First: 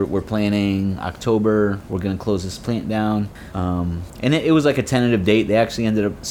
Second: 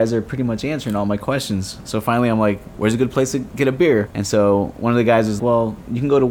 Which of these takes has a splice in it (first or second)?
second